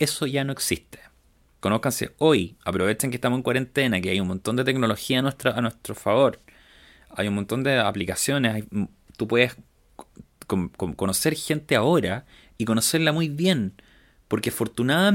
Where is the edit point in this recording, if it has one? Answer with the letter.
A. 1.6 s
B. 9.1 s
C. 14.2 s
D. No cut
A